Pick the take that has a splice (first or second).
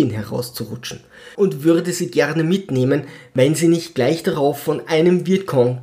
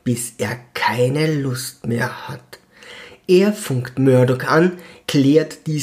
first